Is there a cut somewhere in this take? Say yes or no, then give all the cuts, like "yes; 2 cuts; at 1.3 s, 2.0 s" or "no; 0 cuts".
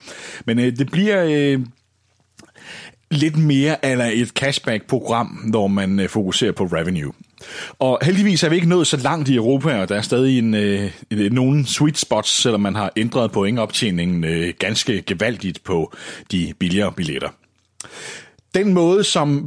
no; 0 cuts